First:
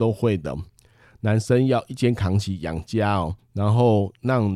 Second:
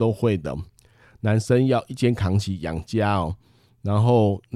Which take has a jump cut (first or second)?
first